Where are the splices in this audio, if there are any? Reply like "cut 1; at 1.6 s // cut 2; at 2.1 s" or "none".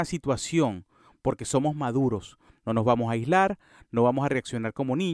none

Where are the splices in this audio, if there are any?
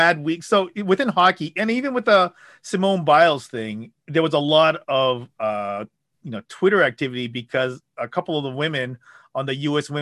cut 1; at 3.9 s

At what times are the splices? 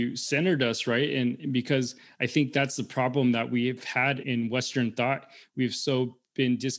cut 1; at 4.2 s

